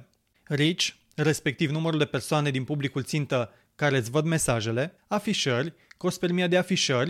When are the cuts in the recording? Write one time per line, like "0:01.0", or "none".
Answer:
0:05.0